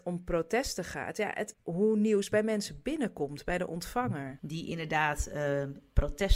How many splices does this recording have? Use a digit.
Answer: 2